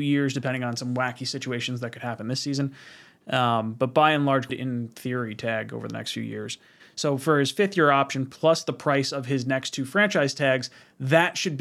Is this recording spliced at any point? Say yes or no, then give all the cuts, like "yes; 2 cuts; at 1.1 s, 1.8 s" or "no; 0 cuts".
yes; 1 cut; at 4.5 s